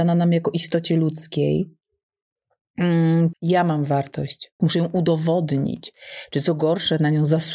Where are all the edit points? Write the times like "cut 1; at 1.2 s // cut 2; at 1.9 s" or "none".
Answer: cut 1; at 3.3 s // cut 2; at 4.6 s